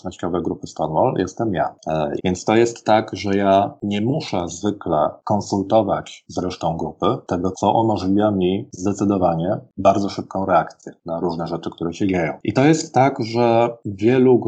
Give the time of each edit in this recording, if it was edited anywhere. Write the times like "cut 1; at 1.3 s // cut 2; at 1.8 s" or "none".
cut 1; at 2.2 s // cut 2; at 7.5 s